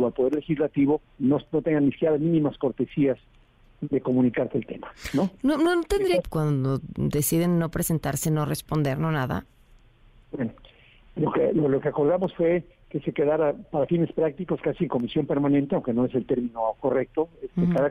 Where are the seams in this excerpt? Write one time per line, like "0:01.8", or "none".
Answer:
0:06.2

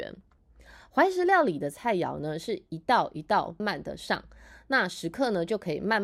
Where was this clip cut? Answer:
0:03.6

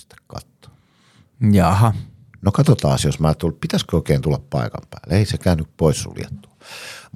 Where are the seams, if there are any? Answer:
none

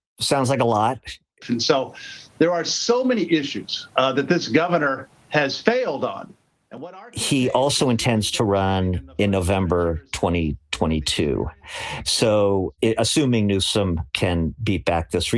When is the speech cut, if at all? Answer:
0:01.4

